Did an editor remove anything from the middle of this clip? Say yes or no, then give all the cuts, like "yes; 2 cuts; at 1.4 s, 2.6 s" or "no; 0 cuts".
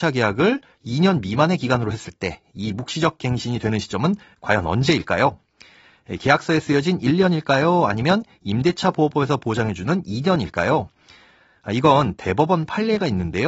no; 0 cuts